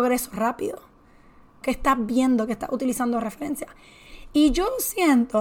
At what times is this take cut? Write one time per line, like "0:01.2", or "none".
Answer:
0:01.6